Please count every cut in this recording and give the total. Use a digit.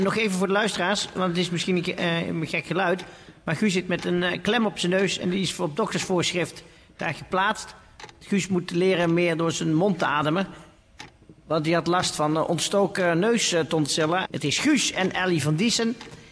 1